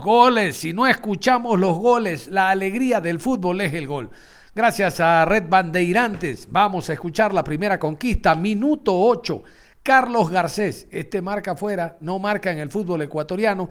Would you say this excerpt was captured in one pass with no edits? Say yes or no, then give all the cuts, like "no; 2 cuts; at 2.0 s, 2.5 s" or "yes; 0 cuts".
yes; 0 cuts